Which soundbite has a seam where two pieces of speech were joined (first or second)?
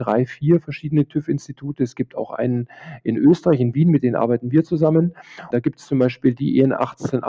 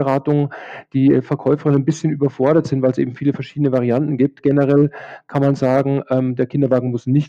first